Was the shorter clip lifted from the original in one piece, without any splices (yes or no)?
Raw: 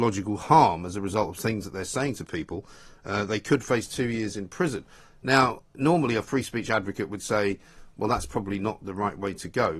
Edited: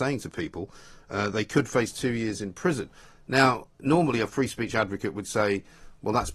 yes